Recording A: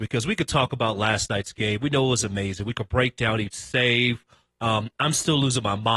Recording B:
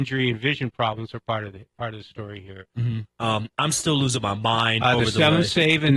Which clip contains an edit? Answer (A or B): B